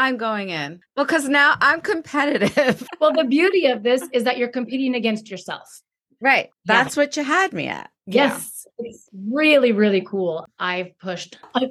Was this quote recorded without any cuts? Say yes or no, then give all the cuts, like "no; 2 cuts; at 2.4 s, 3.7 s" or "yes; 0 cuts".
no; 1 cut; at 6.5 s